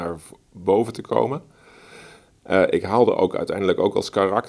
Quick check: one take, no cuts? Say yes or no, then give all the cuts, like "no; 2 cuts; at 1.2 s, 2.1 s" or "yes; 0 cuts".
yes; 0 cuts